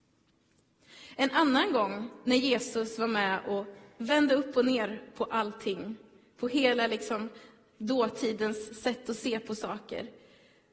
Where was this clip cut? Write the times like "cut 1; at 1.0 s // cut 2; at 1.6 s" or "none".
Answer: none